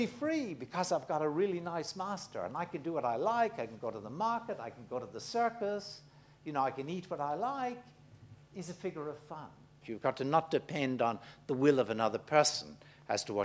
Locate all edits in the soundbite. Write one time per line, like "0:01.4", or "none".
0:09.8